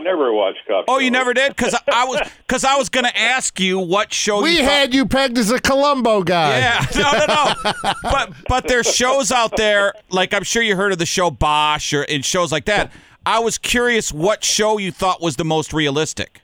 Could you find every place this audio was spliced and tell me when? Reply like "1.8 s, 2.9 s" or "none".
none